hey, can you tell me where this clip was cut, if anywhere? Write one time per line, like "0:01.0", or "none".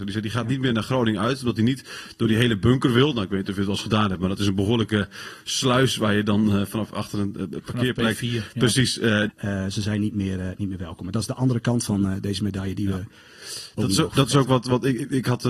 0:09.3

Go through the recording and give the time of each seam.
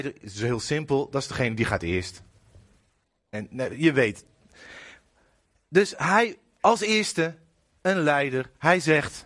0:03.3

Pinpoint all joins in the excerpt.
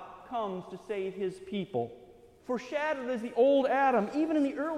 0:02.4

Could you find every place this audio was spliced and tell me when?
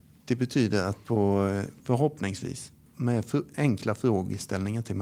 0:01.8

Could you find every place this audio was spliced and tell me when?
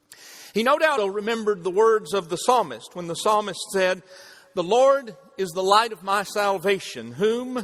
0:01.0

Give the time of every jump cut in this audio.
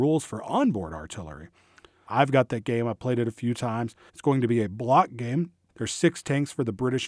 0:02.1
0:04.1
0:05.7

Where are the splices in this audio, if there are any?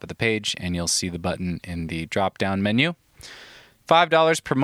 none

